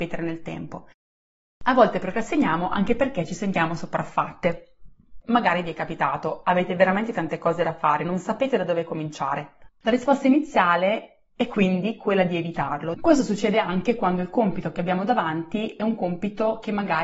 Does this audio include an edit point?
yes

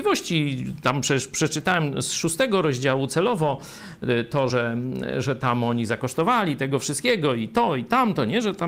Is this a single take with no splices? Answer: yes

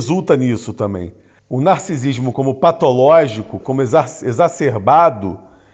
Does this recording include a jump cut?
yes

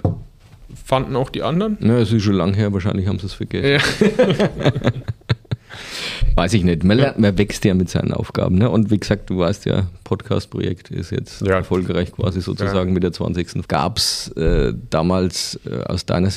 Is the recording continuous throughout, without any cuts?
no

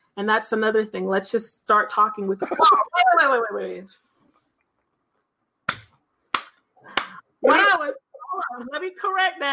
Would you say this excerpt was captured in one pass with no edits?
no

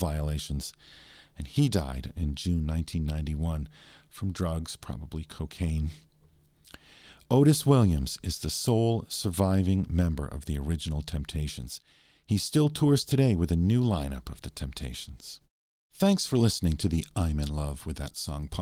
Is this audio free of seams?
yes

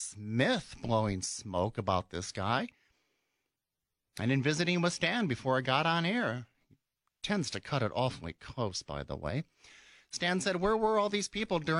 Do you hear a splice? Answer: no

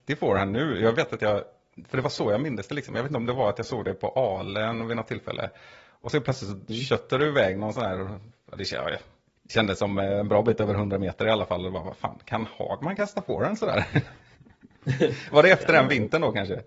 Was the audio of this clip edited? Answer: no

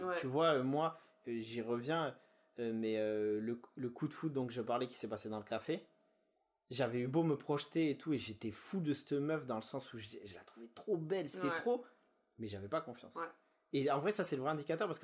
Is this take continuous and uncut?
yes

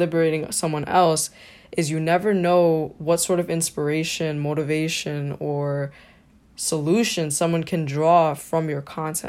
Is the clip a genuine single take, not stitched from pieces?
yes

